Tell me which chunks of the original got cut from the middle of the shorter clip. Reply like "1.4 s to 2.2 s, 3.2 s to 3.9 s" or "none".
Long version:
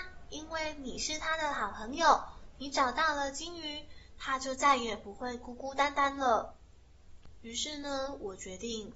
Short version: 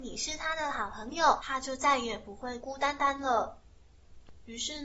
2.2 s to 4.2 s, 5.4 s to 5.6 s

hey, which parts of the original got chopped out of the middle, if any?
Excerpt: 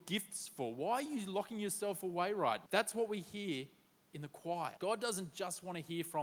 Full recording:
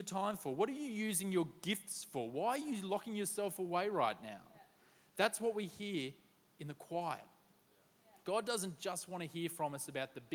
4.2 s to 5.1 s, 7.2 s to 8.2 s

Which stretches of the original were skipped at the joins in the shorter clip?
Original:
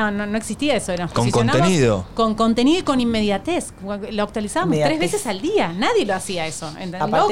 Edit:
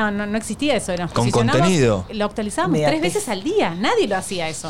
2.1 s to 4.1 s

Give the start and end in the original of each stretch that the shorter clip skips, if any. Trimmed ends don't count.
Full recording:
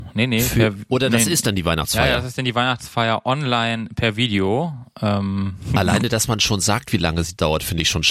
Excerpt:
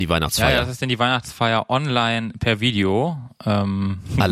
none

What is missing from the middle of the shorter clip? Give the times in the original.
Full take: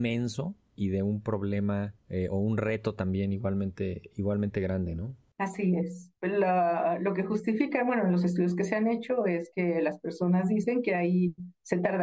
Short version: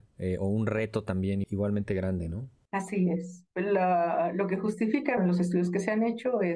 3.3 s to 4.1 s, 7.8 s to 8.0 s

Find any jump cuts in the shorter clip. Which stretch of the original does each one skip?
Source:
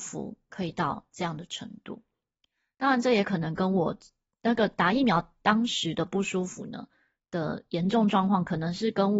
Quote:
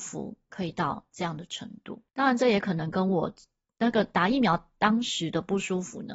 2.1 s to 2.7 s

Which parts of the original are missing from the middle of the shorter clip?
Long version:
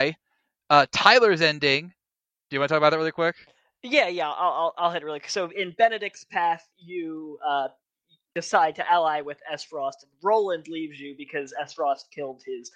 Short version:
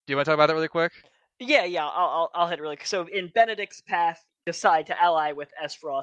6.7 s to 8.2 s

